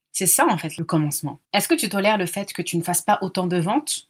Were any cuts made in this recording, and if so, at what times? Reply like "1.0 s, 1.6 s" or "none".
1.4 s

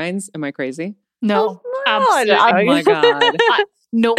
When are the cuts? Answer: 2.5 s

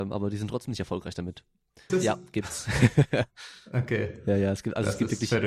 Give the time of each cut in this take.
1.9 s

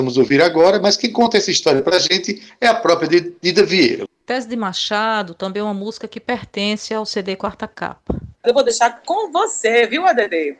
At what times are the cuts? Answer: 4.1 s, 8.4 s

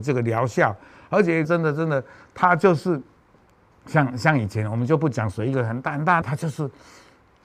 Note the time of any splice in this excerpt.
1.4 s, 6.2 s

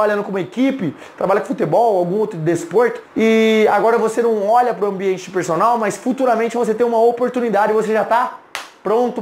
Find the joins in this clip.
3.1 s

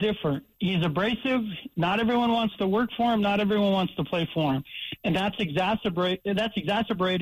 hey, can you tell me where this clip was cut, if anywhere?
none

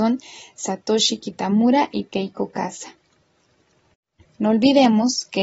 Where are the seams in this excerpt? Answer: 4.3 s

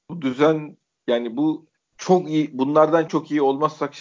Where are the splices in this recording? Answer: 3.1 s

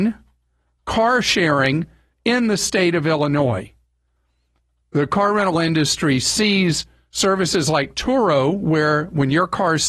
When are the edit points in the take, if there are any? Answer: none

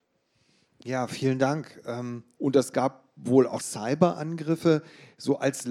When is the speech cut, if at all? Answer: 2.3 s, 3.6 s

